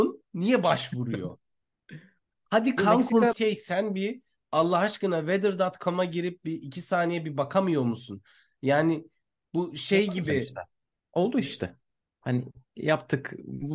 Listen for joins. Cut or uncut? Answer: cut